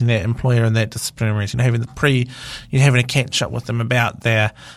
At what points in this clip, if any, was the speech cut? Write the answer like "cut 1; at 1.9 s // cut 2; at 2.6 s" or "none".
none